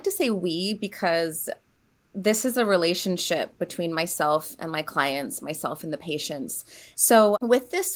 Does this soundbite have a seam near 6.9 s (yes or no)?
yes